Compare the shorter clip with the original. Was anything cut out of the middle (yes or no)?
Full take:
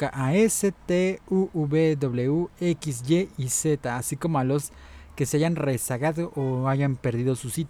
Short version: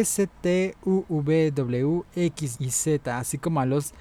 yes